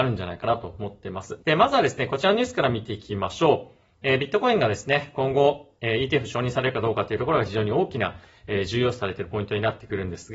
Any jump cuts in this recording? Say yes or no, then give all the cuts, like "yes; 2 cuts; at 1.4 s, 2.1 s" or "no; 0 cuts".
yes; 1 cut; at 1.4 s